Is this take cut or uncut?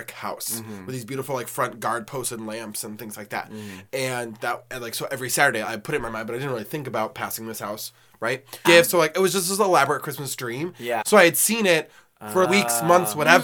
cut